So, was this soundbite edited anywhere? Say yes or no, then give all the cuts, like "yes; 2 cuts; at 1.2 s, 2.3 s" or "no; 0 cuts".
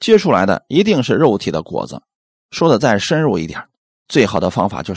yes; 1 cut; at 3.9 s